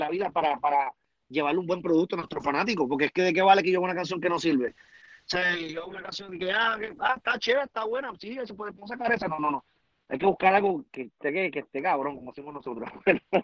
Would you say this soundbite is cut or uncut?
uncut